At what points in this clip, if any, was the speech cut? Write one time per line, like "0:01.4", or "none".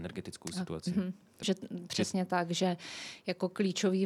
0:01.4